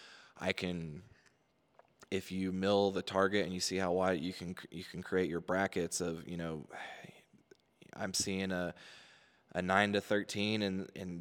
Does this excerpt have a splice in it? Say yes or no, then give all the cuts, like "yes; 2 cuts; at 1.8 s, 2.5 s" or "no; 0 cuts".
no; 0 cuts